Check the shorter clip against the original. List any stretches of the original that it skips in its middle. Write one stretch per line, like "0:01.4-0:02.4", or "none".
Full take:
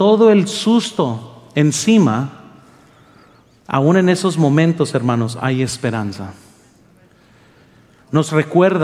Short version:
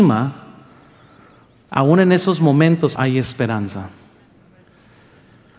0:04.9-0:05.4